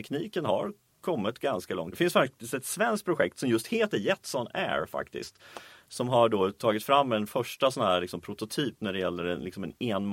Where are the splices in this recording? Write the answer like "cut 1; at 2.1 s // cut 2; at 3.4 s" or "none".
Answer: cut 1; at 1.9 s